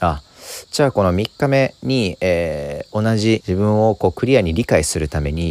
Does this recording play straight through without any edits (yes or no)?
no